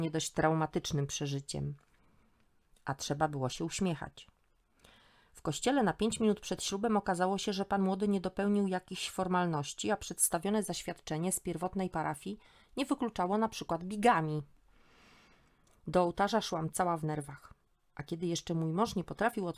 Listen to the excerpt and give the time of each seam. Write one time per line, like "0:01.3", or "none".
none